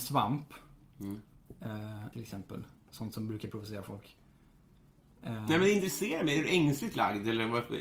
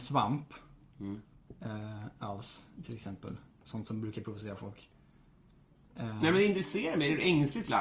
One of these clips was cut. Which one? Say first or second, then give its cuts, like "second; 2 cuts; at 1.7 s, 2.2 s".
first; 1 cut; at 2.1 s